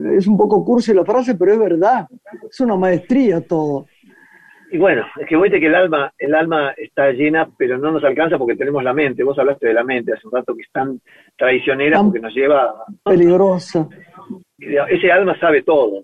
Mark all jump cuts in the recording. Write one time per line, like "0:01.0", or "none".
0:13.1
0:14.4